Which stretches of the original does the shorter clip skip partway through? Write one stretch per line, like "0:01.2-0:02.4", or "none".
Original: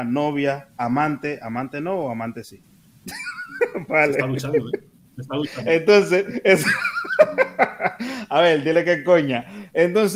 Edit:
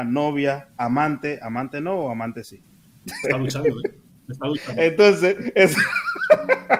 0:03.2-0:04.1